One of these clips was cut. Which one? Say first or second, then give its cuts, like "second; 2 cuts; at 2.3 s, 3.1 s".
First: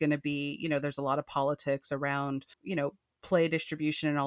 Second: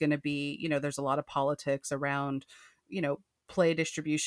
first; 1 cut; at 2.5 s